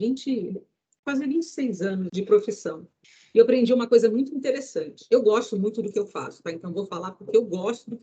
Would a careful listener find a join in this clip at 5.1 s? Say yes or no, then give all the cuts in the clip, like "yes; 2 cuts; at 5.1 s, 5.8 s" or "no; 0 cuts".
no; 1 cut; at 2.1 s